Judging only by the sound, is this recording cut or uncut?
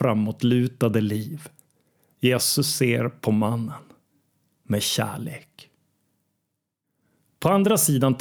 cut